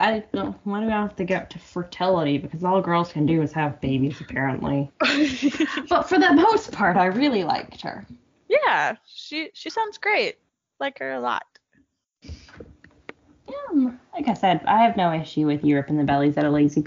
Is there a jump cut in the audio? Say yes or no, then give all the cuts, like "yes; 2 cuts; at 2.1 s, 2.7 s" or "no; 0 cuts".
no; 0 cuts